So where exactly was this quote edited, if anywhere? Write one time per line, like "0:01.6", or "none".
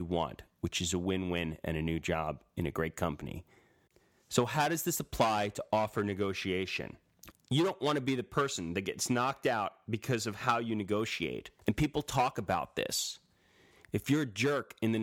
0:07.3
0:11.6